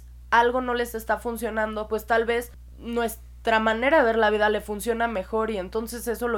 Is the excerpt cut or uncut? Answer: uncut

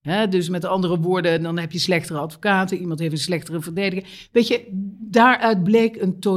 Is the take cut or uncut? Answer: uncut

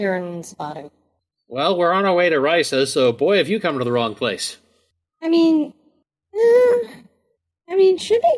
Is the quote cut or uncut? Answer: uncut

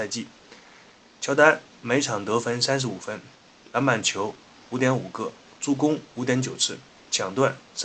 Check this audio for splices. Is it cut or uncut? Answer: uncut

